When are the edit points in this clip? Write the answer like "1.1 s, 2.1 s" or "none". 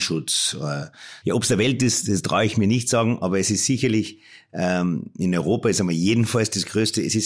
1.2 s

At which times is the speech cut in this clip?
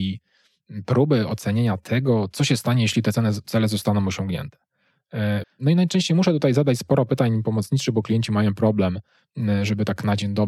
5.4 s

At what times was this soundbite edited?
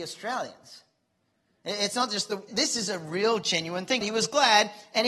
2.5 s, 4.0 s

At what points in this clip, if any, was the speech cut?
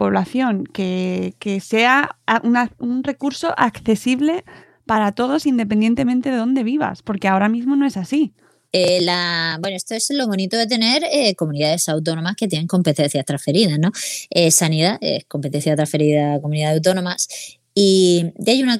8.7 s

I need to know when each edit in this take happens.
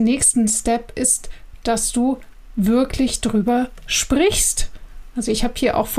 none

